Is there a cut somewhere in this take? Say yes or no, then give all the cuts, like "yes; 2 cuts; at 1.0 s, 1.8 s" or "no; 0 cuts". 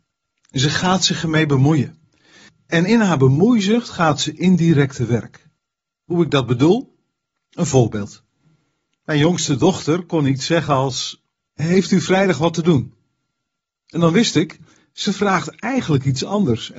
yes; 1 cut; at 11.5 s